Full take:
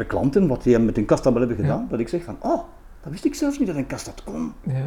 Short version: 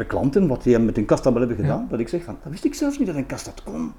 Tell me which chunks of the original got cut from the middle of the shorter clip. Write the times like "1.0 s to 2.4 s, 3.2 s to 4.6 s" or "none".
2.4 s to 3.0 s